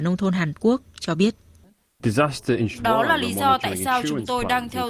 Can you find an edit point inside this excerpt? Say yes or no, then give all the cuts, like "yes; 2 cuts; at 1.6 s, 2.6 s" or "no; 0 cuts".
yes; 1 cut; at 2.7 s